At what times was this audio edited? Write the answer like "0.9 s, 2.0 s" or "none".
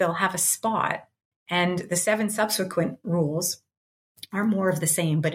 1.3 s